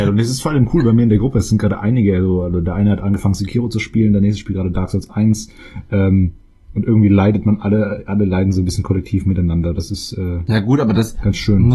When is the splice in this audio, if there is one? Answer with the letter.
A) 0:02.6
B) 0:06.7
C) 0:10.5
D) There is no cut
D